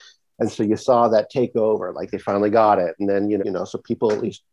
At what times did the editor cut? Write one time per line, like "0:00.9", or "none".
0:03.4